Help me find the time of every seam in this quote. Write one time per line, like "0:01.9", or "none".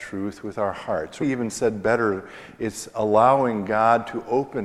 0:01.2